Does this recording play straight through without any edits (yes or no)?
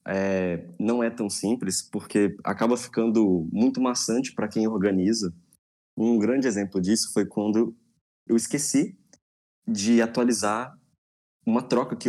no